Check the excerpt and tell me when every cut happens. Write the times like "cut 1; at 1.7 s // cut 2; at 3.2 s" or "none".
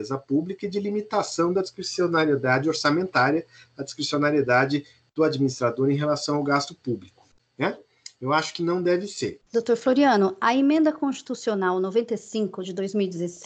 cut 1; at 7.4 s // cut 2; at 9.4 s